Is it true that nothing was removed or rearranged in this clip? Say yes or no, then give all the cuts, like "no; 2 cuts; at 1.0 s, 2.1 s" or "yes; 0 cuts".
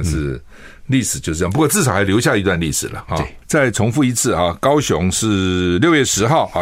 yes; 0 cuts